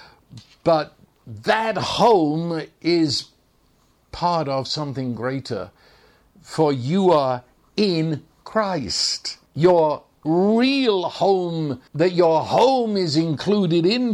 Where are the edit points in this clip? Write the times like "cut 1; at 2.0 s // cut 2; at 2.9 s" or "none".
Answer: cut 1; at 9.5 s // cut 2; at 11.9 s

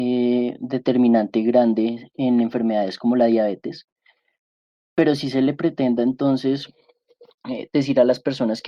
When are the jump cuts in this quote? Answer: none

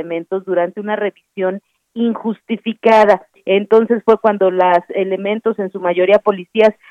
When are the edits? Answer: cut 1; at 3.3 s

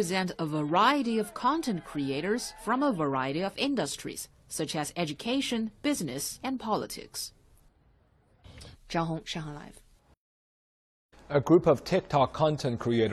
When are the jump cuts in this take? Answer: cut 1; at 8.7 s

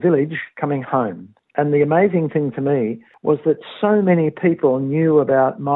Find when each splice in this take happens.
none

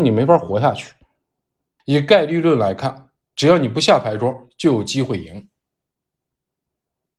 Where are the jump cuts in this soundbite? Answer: cut 1; at 1.8 s

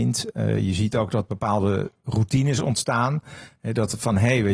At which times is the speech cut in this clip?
none

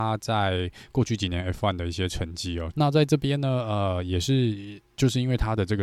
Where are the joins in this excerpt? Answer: cut 1; at 2.7 s

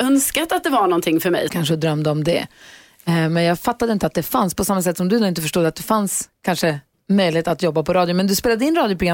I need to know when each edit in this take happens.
cut 1; at 1.5 s

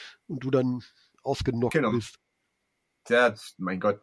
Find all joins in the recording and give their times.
none

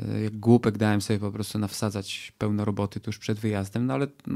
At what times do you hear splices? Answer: cut 1; at 3.0 s

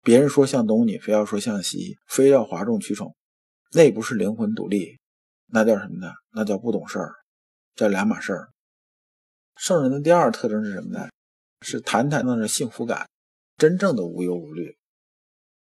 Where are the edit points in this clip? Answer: cut 1; at 2.0 s // cut 2; at 12.2 s

